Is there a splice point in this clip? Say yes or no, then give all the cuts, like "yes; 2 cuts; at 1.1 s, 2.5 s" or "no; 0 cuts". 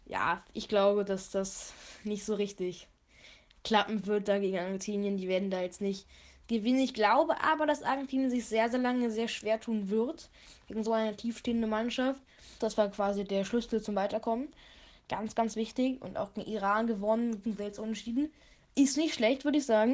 yes; 1 cut; at 12.6 s